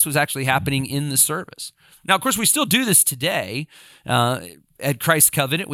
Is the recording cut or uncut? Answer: uncut